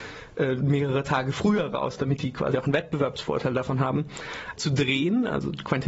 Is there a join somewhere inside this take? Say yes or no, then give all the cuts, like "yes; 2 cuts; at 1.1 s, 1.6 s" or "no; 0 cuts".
yes; 1 cut; at 4.6 s